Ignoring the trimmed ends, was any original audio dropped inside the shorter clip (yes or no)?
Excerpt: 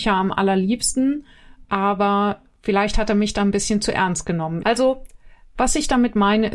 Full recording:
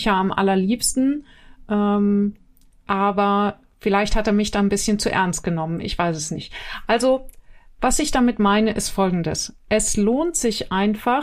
yes